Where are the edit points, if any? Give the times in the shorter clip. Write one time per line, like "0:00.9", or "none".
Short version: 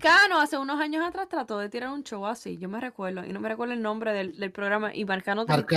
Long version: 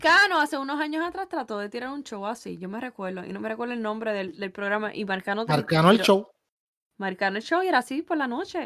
none